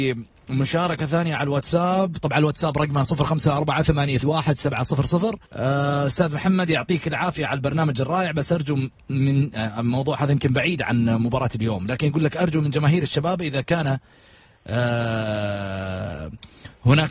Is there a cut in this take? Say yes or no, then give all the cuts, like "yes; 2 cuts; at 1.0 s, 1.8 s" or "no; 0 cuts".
yes; 2 cuts; at 4.2 s, 5.4 s